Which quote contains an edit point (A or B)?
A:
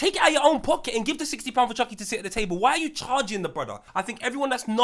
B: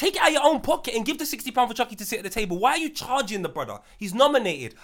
A